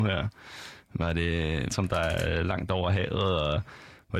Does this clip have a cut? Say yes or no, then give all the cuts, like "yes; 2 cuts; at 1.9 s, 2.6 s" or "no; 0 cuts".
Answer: yes; 1 cut; at 1.7 s